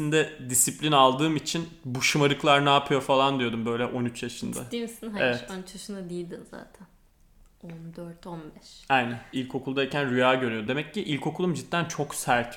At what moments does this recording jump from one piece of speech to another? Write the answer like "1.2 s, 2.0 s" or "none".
9.3 s, 10.7 s